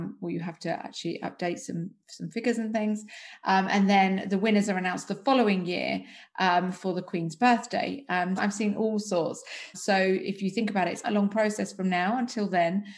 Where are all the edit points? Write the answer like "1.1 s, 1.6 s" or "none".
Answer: 8.4 s, 9.7 s, 11.0 s

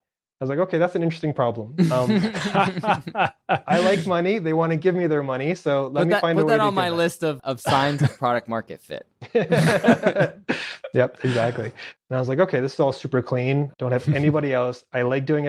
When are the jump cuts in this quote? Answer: 7.4 s, 12.0 s, 13.7 s

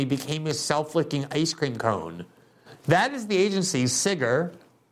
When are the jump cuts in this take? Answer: 2.7 s

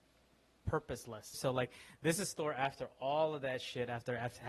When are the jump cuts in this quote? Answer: 1.3 s

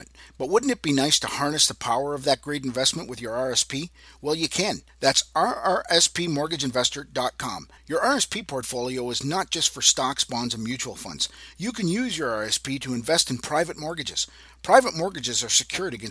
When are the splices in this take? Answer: 4.9 s, 7.8 s

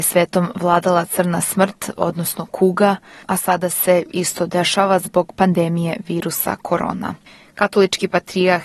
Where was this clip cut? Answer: none

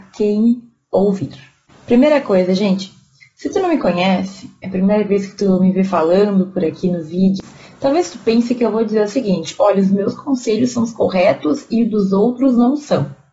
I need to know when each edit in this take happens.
none

